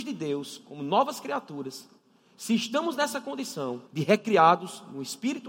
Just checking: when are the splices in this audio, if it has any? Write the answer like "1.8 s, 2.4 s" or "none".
3.9 s

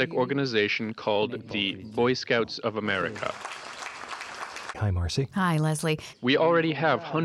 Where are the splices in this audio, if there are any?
4.7 s, 6.1 s

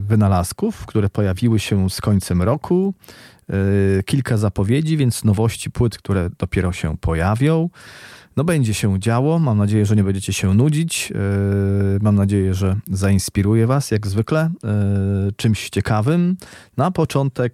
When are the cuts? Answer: none

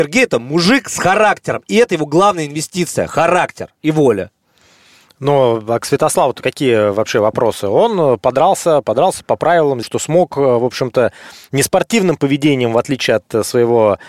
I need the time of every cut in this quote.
9.8 s

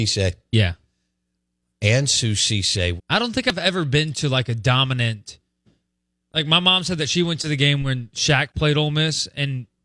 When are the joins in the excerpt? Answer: 3.0 s

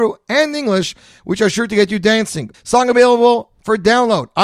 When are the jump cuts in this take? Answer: 2.5 s

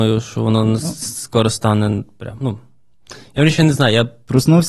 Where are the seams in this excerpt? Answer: none

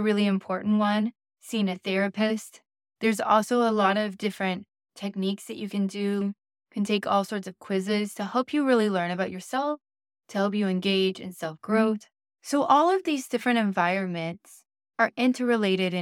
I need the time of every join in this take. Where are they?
6.2 s

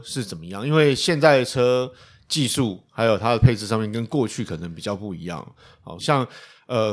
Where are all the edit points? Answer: 6.0 s

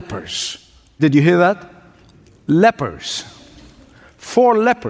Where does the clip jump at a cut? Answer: none

